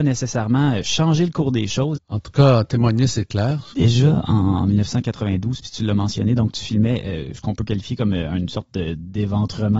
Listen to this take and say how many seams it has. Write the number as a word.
two